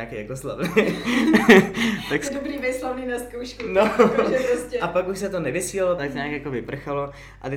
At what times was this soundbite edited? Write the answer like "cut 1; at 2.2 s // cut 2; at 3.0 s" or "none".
cut 1; at 6.0 s